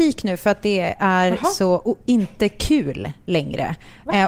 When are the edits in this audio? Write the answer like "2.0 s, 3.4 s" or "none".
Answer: none

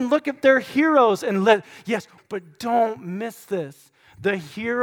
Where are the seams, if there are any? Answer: 2.2 s

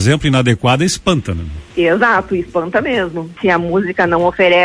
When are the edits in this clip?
1.7 s, 3.4 s

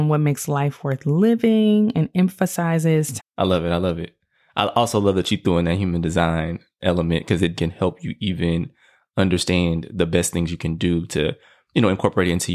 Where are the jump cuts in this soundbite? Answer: 3.2 s, 7.6 s

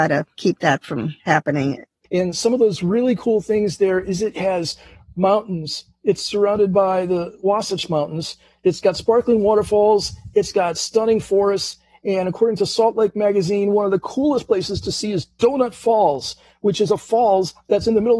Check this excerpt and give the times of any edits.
2.1 s

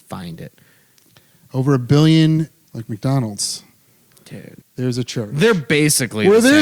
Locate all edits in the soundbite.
2.6 s, 4.6 s

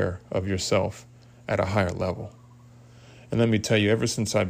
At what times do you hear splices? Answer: none

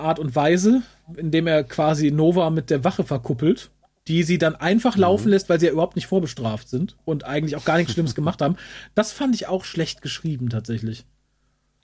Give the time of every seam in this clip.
none

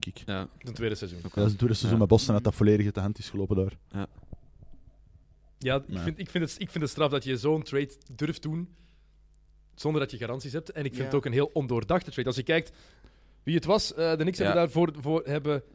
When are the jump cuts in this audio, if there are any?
none

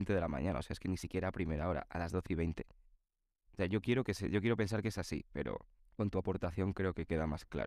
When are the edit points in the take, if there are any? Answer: 3.5 s

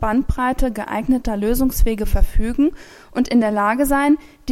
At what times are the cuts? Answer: none

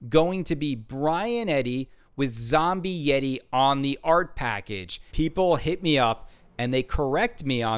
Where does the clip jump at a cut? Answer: 5.1 s

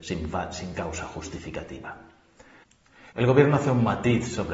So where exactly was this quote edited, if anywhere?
3.1 s

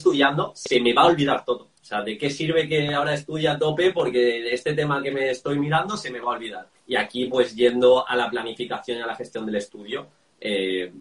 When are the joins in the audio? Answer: 6.7 s

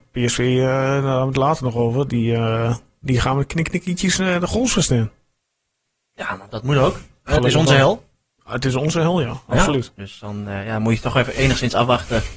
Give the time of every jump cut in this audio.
6.5 s, 10.0 s

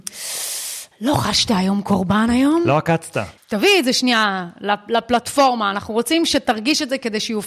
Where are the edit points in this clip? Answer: 3.4 s

